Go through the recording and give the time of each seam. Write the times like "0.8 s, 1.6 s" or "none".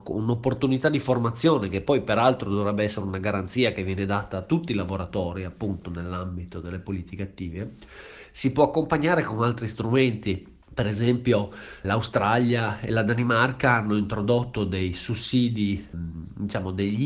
10.6 s, 11.8 s, 15.9 s

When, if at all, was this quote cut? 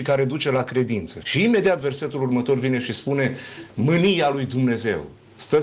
1.2 s

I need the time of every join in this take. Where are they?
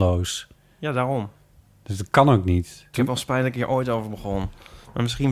2.9 s

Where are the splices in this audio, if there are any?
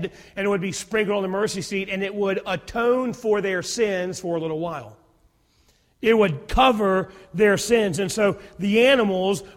none

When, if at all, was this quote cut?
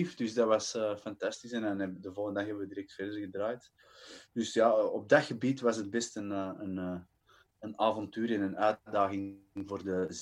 none

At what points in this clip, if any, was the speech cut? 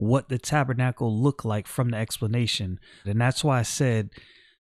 3.0 s

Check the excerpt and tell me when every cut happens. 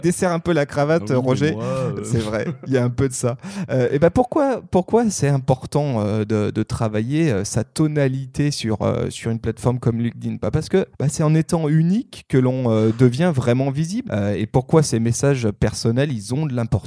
10.9 s, 14.1 s

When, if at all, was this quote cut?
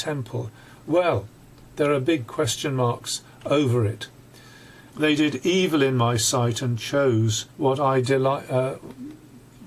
4.9 s, 7.5 s

